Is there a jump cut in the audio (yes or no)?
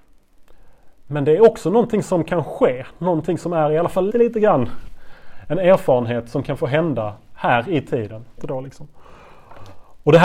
yes